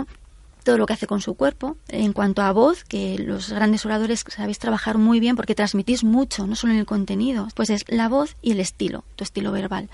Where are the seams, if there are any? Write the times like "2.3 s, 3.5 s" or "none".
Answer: 1.9 s, 7.5 s